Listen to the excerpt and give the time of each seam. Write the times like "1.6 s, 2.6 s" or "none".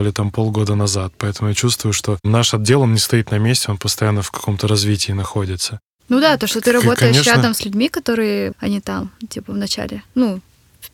8.5 s

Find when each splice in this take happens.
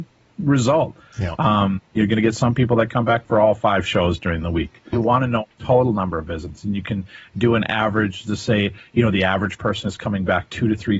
4.9 s

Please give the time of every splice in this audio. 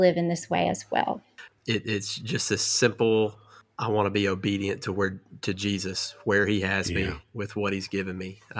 1.5 s

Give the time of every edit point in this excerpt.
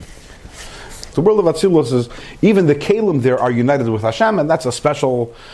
1.1 s

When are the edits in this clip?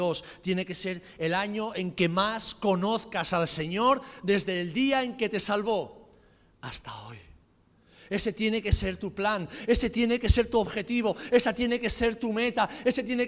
none

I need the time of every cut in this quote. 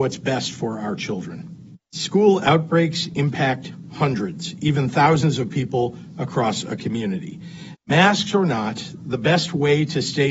1.8 s, 7.7 s

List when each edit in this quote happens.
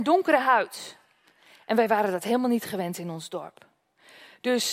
none

